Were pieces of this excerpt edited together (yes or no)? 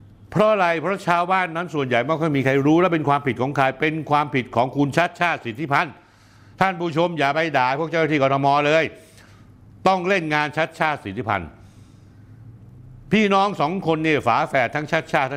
no